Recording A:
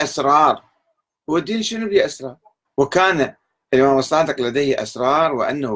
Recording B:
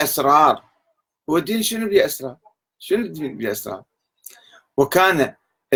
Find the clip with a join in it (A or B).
A